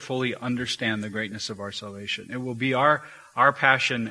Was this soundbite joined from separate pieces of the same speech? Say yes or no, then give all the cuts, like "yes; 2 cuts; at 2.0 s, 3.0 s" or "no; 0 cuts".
no; 0 cuts